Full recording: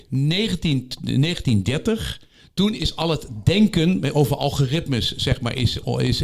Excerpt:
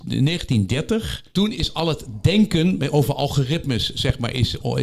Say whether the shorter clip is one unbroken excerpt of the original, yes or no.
no